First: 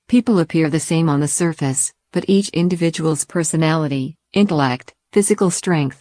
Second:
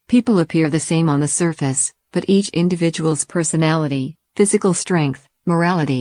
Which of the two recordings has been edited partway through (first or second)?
second